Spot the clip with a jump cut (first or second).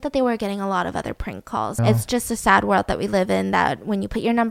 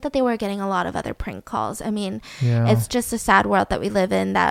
first